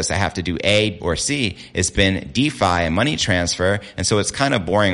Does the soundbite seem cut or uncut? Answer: cut